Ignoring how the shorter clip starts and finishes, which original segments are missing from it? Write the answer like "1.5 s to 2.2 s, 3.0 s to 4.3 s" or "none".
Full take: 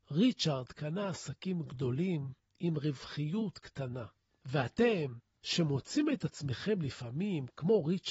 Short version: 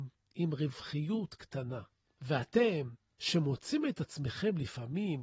none